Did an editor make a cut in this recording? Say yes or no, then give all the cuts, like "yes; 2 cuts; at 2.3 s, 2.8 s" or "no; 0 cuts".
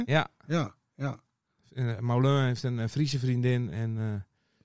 no; 0 cuts